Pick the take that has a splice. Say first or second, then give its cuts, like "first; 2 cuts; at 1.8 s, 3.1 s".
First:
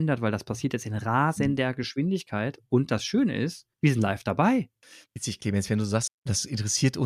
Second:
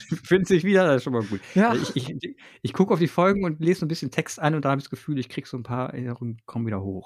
first; 2 cuts; at 3.7 s, 6.1 s